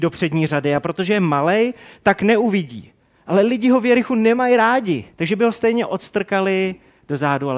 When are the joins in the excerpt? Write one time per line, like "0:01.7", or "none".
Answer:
0:05.1